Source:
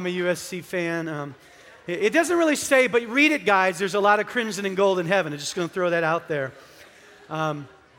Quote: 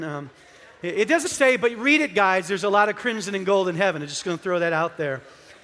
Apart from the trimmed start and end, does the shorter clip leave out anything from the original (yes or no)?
yes